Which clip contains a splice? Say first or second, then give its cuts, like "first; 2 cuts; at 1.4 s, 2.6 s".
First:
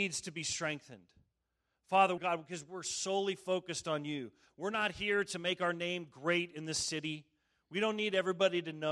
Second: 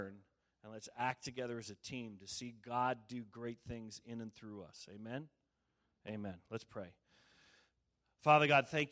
first; 1 cut; at 2.2 s